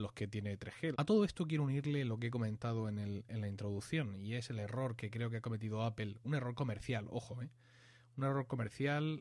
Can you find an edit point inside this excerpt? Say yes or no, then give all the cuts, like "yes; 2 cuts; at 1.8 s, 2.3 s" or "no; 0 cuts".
yes; 1 cut; at 0.9 s